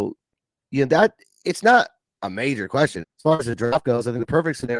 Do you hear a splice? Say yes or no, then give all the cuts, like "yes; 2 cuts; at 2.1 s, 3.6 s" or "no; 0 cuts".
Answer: yes; 1 cut; at 3.0 s